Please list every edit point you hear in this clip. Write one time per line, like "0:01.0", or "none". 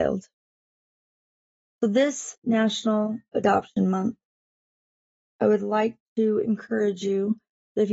none